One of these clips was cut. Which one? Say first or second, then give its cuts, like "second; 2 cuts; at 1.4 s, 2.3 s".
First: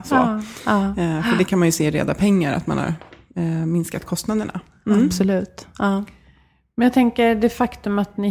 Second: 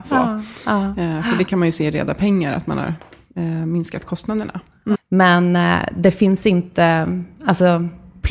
second; 1 cut; at 4.9 s